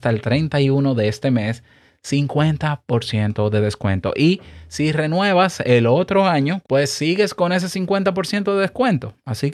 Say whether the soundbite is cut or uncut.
cut